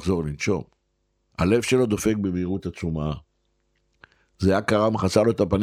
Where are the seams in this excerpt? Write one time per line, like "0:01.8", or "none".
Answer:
0:01.3